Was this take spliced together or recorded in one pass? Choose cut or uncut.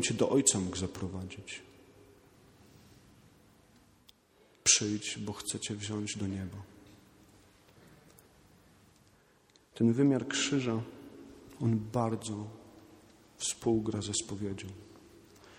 uncut